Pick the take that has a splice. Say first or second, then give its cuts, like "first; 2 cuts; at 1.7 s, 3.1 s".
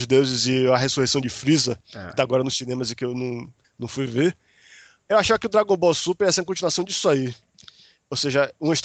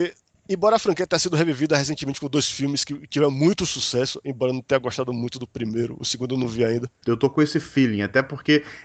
second; 1 cut; at 7.0 s